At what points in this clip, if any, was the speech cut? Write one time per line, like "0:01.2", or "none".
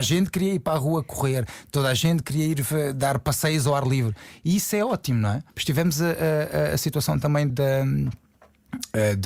0:05.5
0:07.5